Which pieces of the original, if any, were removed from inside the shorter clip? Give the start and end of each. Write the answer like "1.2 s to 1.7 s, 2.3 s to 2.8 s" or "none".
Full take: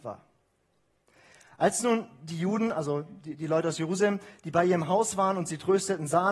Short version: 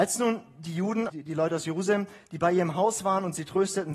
2.7 s to 3.2 s